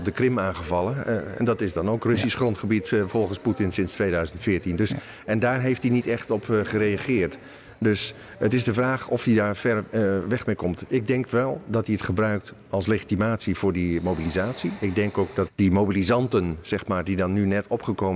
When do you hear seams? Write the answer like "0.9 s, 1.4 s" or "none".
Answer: 15.5 s